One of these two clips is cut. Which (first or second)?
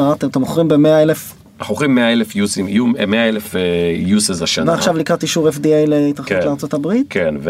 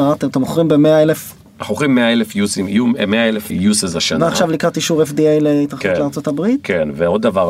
second